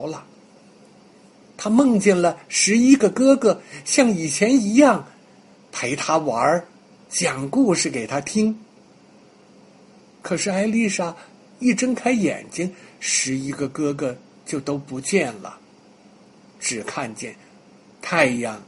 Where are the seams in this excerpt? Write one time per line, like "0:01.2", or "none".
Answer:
none